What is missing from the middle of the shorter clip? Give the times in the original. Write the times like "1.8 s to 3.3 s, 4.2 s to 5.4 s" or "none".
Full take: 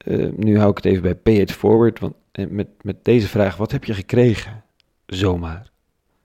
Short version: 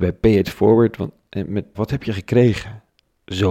2.8 s to 3.6 s